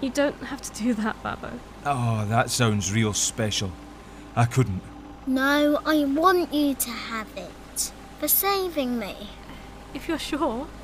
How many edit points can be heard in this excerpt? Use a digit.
0